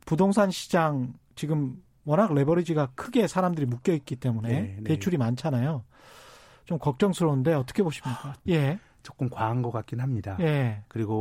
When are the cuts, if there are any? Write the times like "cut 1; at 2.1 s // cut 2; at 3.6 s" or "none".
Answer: cut 1; at 8.5 s